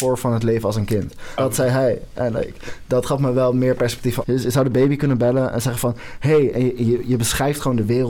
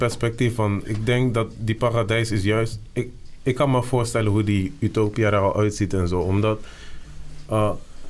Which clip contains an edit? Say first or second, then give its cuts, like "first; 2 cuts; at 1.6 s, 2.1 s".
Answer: first; 2 cuts; at 1.4 s, 4.2 s